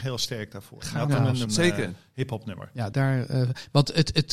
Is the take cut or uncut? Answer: cut